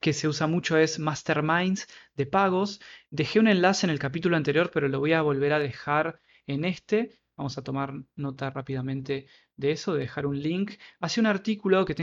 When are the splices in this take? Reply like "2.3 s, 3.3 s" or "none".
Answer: none

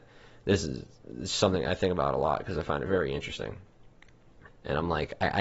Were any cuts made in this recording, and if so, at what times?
4.5 s

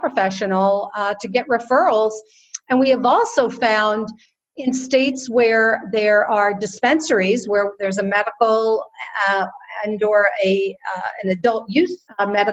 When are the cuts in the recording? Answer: none

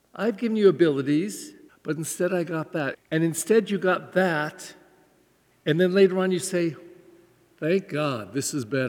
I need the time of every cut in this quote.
1.7 s, 2.9 s

